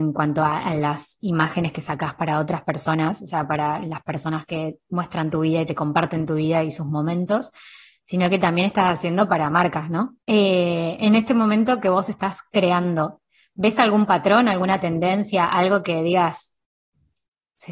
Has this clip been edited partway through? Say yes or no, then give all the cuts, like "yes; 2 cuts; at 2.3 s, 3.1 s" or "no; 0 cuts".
yes; 1 cut; at 10.2 s